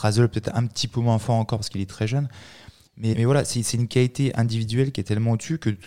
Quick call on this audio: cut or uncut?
cut